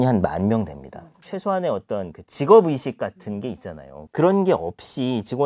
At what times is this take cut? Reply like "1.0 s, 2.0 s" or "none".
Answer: 1.2 s